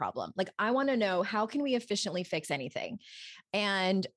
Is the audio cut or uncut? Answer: uncut